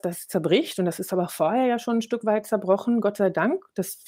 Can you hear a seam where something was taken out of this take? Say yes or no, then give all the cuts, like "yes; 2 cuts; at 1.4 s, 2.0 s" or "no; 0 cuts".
no; 0 cuts